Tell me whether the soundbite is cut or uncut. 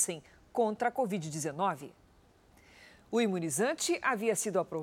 uncut